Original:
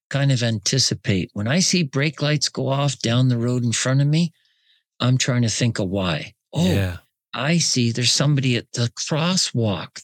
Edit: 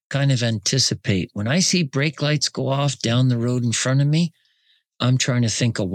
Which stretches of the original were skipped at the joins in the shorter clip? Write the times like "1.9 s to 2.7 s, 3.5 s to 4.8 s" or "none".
none